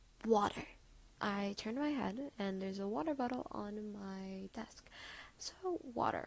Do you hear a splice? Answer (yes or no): yes